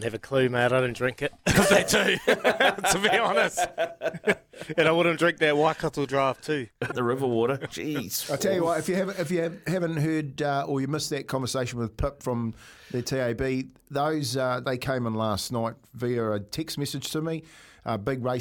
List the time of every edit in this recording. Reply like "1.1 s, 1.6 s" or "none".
6.9 s, 14.6 s

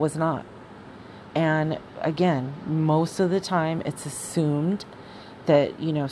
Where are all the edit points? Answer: 1.3 s

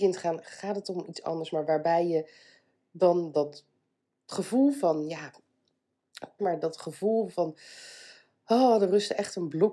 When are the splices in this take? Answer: 6.4 s

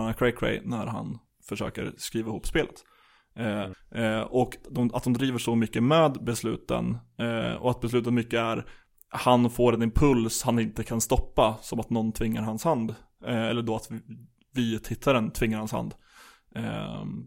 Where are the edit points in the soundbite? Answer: 3.7 s

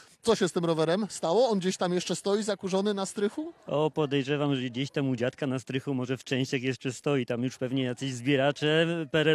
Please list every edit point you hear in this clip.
none

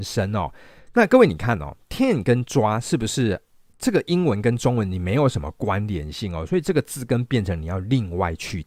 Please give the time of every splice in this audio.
0.9 s

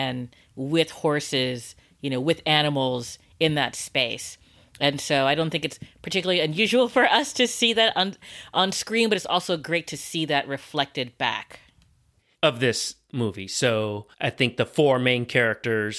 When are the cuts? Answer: 12.3 s, 14.1 s

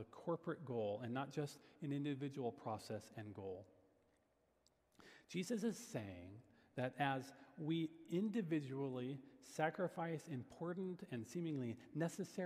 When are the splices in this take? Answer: none

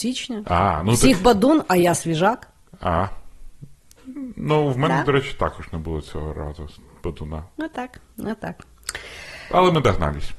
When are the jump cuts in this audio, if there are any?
none

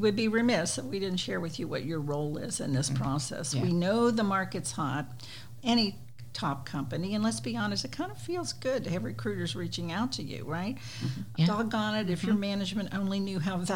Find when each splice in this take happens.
5.6 s, 11.4 s

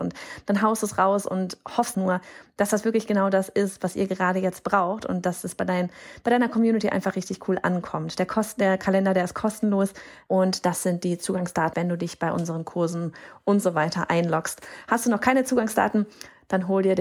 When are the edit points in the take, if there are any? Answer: 1.9 s, 10.3 s, 11.7 s

